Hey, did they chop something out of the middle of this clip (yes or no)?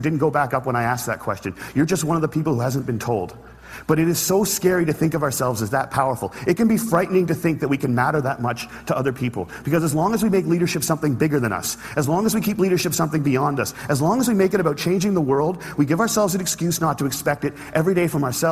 no